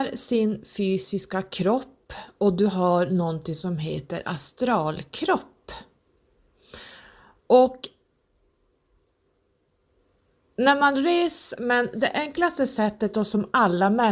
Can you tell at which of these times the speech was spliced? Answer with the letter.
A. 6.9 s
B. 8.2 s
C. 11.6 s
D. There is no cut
C